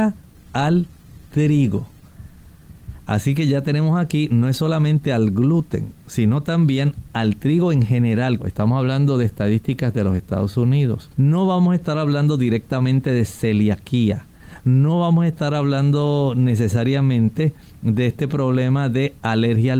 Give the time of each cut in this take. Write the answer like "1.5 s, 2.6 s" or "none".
8.4 s, 11.1 s